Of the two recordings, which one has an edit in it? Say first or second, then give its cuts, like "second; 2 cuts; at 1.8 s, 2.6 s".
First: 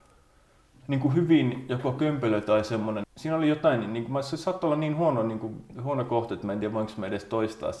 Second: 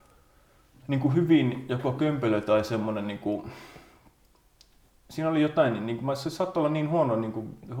first; 1 cut; at 3.0 s